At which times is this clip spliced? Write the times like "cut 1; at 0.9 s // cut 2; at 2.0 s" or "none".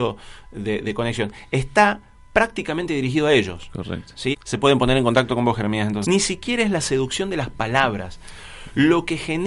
cut 1; at 4.3 s // cut 2; at 6.0 s